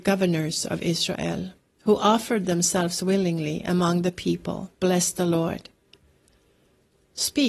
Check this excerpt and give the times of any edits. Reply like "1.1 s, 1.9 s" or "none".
4.7 s